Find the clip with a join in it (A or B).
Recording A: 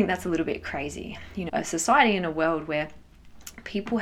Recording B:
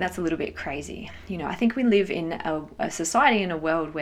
A